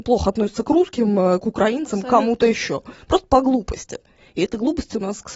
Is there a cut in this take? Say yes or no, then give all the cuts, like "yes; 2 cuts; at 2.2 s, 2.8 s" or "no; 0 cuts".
no; 0 cuts